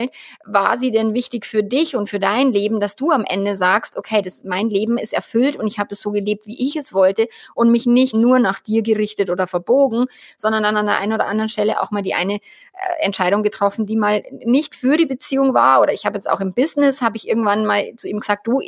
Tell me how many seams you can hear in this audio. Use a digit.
1